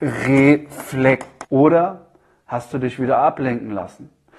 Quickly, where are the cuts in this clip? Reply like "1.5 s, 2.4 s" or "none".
1.4 s